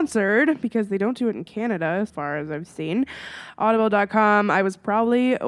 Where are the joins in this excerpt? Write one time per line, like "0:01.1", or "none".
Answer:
0:02.1